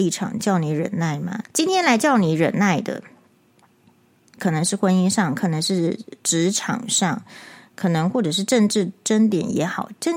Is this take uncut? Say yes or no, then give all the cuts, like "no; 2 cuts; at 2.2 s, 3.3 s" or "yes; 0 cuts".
no; 2 cuts; at 1.4 s, 4.4 s